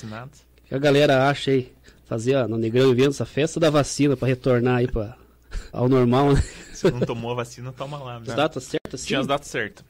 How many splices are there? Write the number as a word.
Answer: two